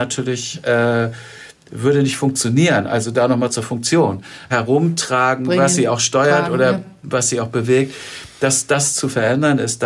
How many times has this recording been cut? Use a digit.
1